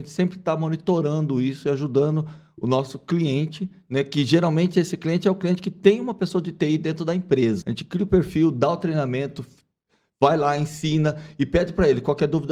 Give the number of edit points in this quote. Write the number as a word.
one